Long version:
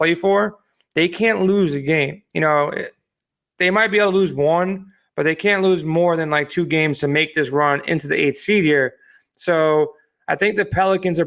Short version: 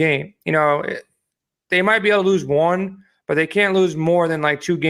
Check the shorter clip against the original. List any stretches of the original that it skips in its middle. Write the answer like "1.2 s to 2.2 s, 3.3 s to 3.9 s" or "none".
none